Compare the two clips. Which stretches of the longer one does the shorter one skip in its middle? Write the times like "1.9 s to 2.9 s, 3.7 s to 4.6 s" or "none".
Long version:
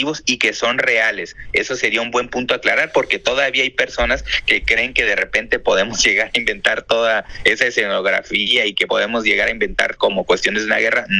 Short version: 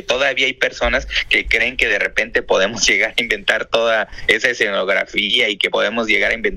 none